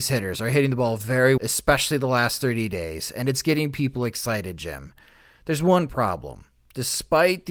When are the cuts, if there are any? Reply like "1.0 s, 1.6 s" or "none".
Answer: 1.4 s